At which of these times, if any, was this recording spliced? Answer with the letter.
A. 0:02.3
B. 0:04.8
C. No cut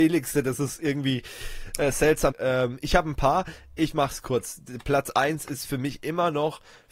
A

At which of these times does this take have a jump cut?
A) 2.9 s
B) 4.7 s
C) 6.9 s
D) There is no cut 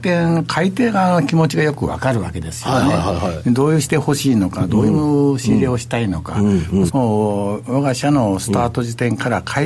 C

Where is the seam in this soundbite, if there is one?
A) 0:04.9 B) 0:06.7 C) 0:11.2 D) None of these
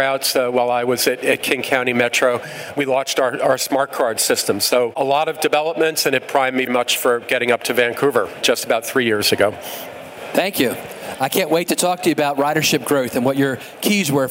B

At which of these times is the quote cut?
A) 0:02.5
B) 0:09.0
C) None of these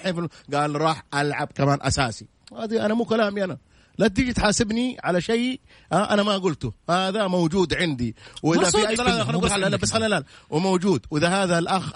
B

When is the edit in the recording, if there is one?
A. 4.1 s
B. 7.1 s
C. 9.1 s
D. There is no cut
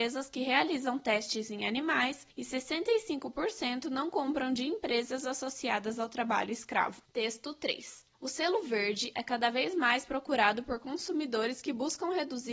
C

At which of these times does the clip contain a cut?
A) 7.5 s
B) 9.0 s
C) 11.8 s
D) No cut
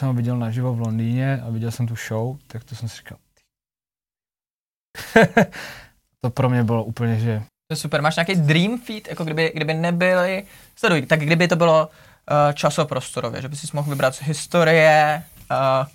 A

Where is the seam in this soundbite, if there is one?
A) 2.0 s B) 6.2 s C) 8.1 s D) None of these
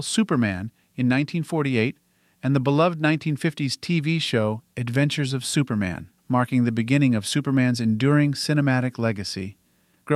B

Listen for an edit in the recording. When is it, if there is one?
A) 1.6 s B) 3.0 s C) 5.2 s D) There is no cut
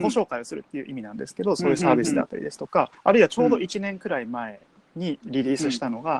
B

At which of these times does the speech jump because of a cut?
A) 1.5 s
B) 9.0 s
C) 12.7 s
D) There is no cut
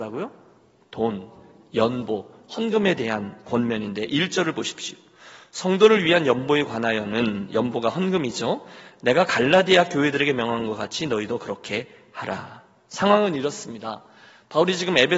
D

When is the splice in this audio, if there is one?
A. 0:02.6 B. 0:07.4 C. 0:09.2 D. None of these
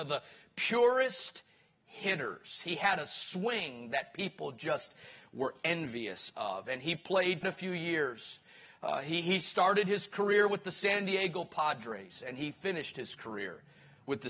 B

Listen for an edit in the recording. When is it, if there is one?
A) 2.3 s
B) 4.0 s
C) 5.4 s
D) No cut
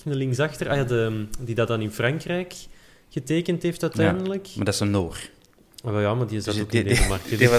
D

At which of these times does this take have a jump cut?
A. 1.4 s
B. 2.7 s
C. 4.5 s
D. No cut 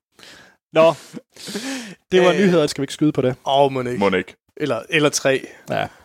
B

